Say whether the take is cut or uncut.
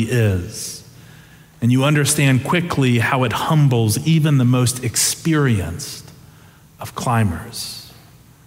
uncut